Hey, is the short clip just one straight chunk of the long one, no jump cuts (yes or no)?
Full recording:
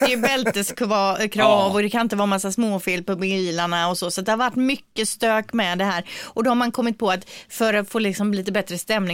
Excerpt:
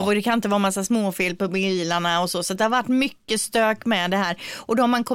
yes